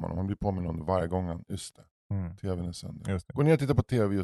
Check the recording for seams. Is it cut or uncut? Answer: uncut